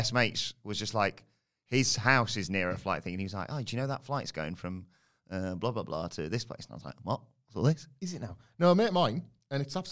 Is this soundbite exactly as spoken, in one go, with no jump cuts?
yes; 0 cuts

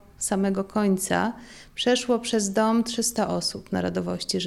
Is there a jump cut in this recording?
no; 0 cuts

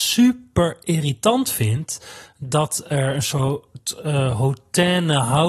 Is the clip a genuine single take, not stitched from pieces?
yes; 0 cuts

